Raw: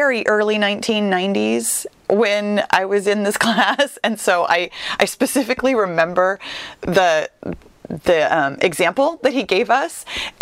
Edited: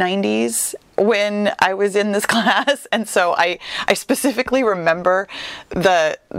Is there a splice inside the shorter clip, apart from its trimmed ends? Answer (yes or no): no